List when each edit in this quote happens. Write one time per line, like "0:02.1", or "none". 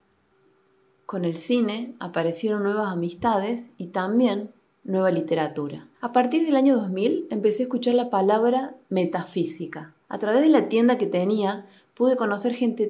0:05.9
0:10.0